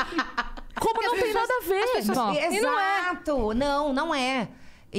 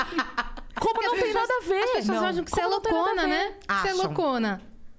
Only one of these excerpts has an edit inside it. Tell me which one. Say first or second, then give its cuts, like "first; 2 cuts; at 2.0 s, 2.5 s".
first; 1 cut; at 2.1 s